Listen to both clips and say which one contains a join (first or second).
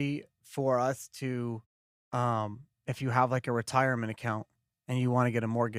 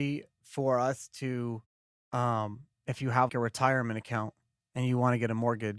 second